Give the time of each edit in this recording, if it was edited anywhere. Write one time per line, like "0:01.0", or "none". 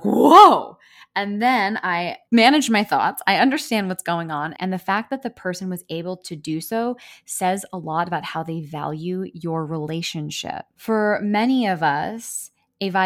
0:04.6
0:10.8